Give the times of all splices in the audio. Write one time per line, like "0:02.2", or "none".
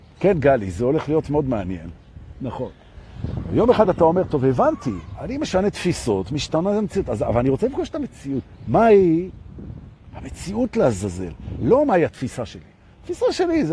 none